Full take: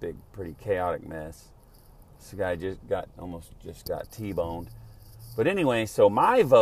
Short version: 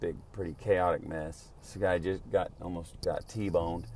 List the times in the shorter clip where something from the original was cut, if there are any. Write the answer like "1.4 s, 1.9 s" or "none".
1.6 s, 3.0 s